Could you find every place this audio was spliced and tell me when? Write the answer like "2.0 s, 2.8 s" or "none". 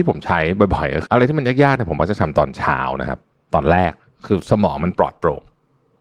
1.1 s